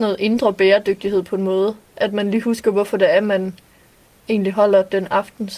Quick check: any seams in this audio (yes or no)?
no